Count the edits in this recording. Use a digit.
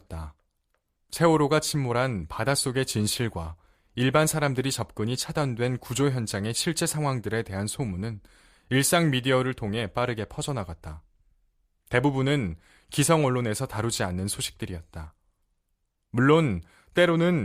1